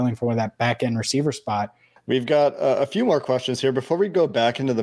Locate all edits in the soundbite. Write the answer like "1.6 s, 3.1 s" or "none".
2.0 s